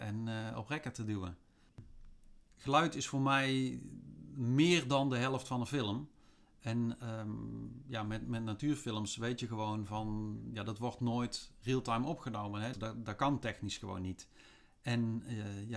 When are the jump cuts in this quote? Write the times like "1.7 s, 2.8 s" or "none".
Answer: 12.7 s